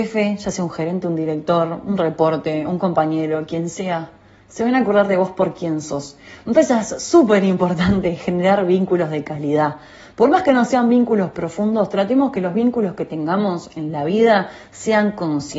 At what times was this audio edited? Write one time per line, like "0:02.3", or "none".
none